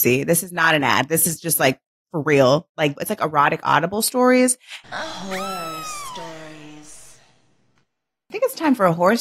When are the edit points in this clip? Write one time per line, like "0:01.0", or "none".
0:03.0
0:04.8